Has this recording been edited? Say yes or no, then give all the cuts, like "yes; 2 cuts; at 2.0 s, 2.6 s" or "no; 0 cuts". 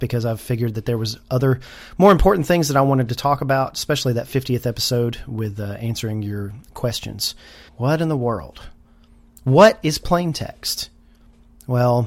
yes; 1 cut; at 7.7 s